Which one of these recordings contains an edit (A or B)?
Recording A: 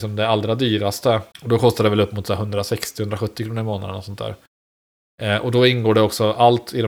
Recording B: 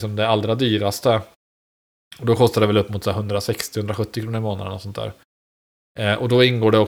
A